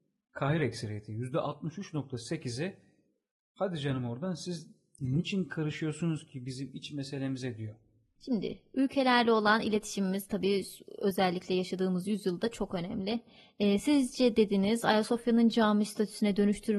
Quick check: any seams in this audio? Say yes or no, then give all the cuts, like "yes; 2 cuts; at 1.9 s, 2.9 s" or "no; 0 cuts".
yes; 1 cut; at 8.2 s